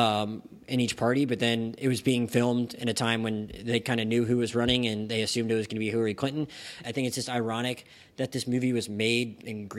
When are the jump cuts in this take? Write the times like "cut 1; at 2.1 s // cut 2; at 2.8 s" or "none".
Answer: cut 1; at 6.8 s